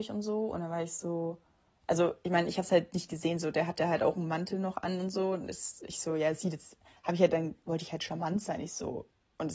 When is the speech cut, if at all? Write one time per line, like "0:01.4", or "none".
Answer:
none